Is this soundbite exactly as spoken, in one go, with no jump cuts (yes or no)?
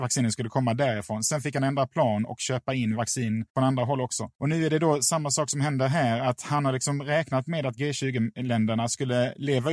yes